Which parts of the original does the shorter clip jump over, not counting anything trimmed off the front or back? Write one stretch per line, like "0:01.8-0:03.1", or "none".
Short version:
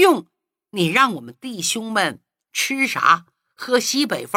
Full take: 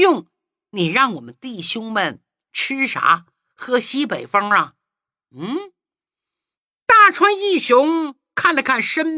none